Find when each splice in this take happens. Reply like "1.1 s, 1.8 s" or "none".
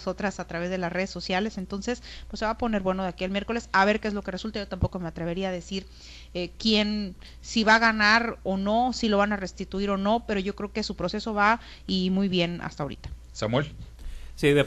none